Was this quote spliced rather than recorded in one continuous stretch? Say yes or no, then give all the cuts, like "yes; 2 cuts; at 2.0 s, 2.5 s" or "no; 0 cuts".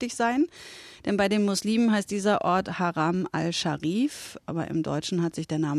no; 0 cuts